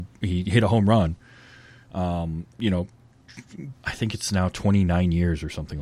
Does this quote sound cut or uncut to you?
cut